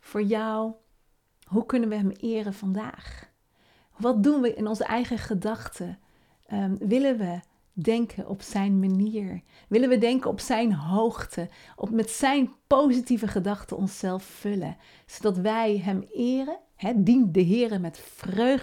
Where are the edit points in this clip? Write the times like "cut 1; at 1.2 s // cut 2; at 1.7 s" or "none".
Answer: none